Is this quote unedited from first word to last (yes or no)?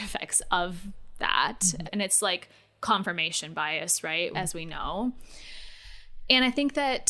no